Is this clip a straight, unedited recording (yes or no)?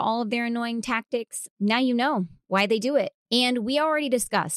no